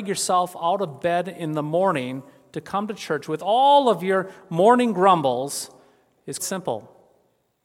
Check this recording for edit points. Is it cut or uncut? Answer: cut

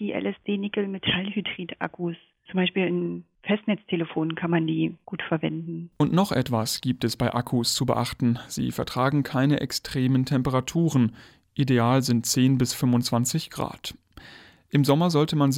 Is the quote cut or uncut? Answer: uncut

